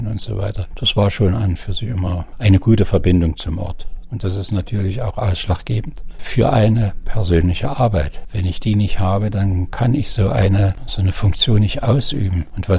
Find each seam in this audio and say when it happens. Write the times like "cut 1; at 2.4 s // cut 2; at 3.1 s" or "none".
cut 1; at 4.1 s